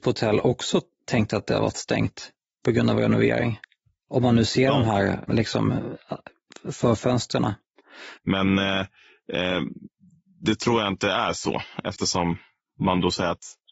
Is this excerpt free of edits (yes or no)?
no